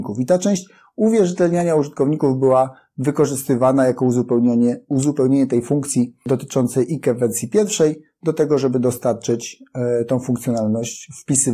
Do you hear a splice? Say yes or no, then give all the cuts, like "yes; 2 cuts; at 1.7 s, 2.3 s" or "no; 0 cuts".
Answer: no; 0 cuts